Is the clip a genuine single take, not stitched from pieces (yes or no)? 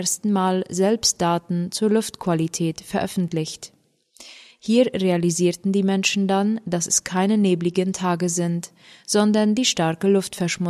yes